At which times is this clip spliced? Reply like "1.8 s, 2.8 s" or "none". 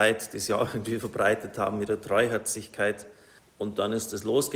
3.4 s